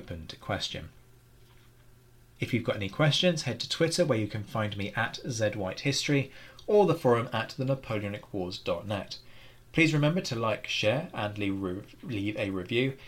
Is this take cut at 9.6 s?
no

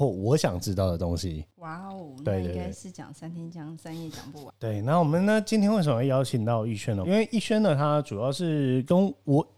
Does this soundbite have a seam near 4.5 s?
yes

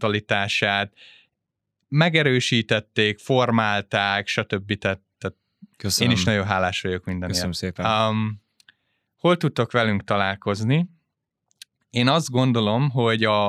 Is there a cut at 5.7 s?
yes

